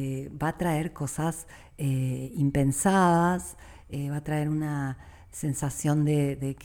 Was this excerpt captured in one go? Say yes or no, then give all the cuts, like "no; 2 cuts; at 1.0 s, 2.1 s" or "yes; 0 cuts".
yes; 0 cuts